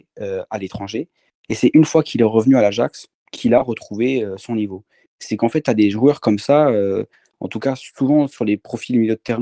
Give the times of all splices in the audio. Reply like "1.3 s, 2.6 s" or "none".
none